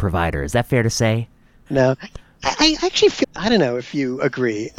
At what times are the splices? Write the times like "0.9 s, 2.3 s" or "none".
1.7 s, 3.2 s